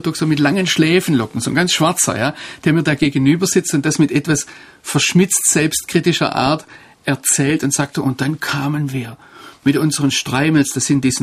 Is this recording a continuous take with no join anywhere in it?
yes; 0 cuts

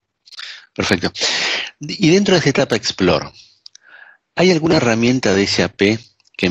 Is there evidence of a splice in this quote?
no; 0 cuts

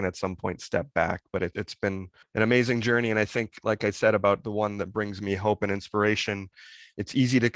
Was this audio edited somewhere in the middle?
no; 0 cuts

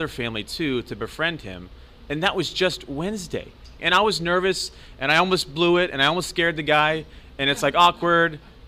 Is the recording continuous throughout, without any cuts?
no; 1 cut; at 3.8 s

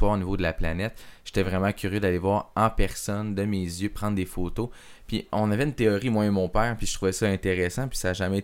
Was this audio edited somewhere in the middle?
no; 0 cuts

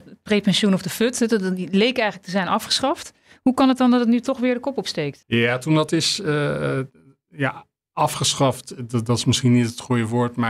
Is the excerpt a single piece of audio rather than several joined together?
no; 1 cut; at 5.2 s

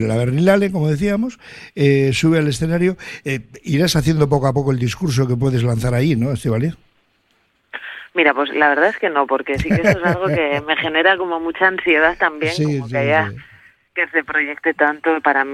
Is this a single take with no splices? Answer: yes; 0 cuts

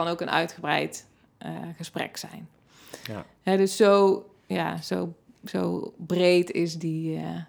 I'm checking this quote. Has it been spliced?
no; 0 cuts

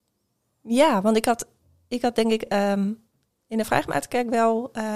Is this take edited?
no; 0 cuts

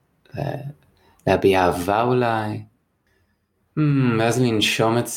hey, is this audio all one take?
yes; 0 cuts

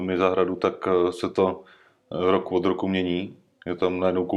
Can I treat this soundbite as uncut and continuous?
yes; 0 cuts

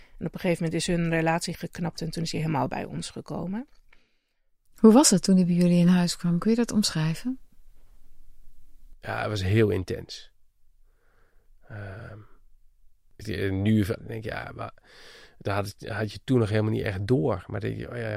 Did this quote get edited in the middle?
yes; 1 cut; at 13.9 s

